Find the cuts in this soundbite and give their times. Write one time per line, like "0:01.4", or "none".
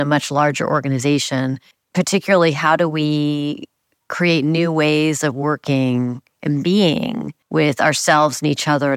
0:01.7
0:07.4